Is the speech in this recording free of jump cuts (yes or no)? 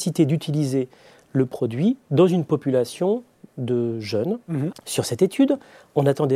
no